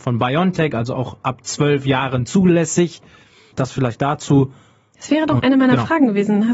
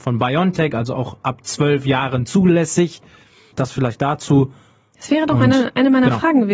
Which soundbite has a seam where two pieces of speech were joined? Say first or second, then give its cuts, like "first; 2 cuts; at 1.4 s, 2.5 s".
first; 1 cut; at 5.4 s